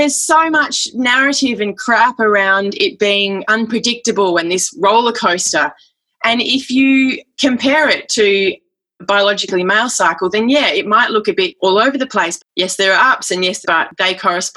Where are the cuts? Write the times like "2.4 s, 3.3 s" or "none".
12.4 s, 13.6 s